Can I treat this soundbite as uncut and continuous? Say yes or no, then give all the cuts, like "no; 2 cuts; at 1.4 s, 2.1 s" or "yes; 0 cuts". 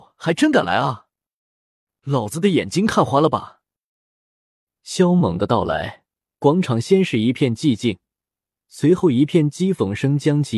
yes; 0 cuts